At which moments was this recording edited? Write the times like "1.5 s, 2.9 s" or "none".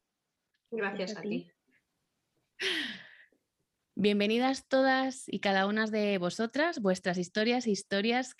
none

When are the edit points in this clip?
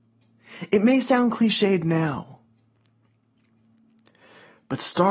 none

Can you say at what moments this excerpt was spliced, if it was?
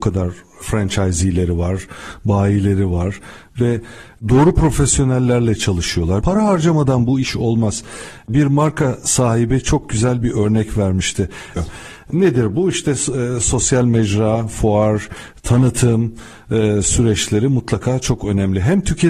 6.2 s, 11.6 s

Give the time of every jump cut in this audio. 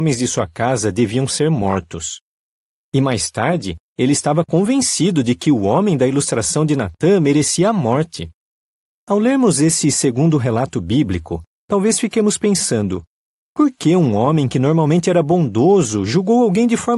none

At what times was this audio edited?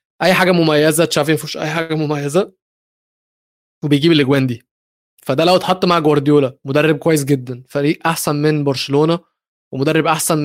none

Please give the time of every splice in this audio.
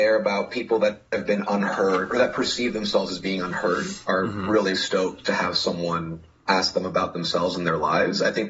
4.7 s

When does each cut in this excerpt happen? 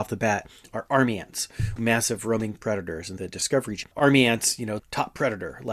1.8 s, 3.2 s, 4.8 s

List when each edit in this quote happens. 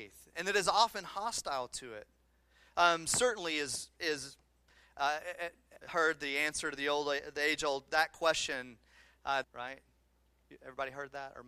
5.8 s, 9.4 s

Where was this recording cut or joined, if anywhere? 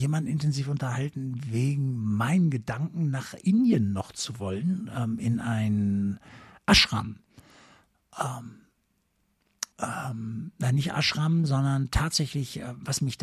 9.7 s

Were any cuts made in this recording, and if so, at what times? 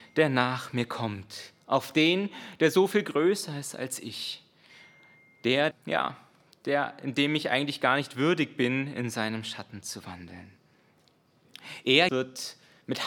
5.7 s, 12.1 s

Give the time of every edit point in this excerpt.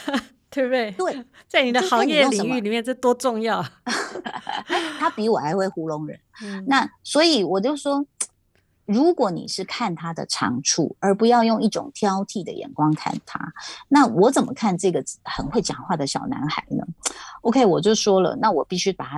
none

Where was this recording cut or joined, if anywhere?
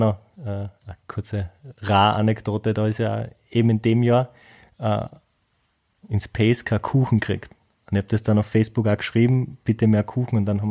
6.0 s

